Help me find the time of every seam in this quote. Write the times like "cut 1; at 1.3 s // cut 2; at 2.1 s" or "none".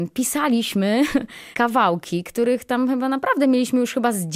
cut 1; at 1.5 s